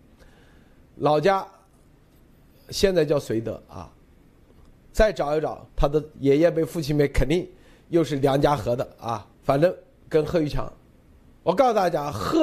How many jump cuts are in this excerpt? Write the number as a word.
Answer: three